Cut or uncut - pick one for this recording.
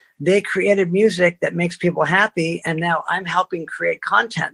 uncut